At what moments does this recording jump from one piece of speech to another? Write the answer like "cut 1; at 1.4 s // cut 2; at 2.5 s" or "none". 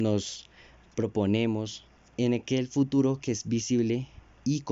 cut 1; at 2.0 s